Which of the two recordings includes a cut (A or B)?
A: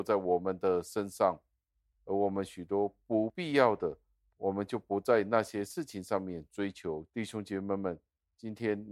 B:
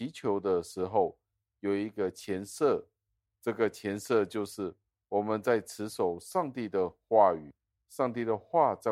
A